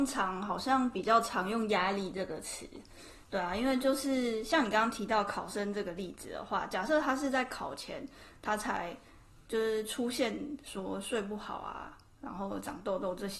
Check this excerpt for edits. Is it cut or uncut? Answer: uncut